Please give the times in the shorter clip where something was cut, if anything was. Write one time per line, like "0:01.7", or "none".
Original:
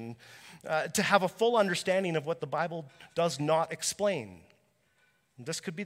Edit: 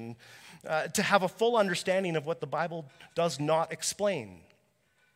none